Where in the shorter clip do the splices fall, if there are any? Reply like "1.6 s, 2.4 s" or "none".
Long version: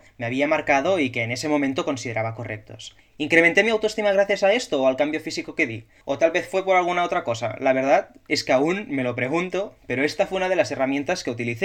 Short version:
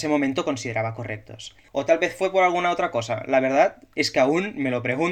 1.6 s

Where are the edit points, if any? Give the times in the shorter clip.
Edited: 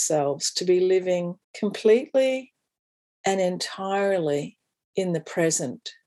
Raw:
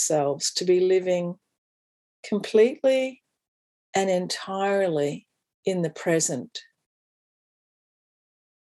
1.4 s

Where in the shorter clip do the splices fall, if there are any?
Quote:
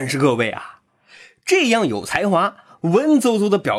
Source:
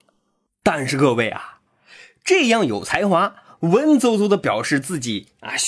none

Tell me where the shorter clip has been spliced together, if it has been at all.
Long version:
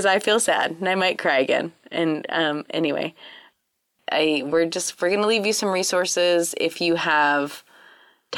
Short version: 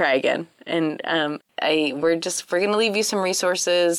1.4 s

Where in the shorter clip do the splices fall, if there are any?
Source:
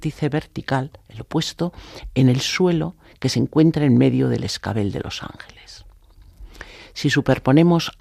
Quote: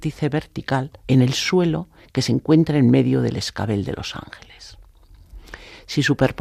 1.0 s

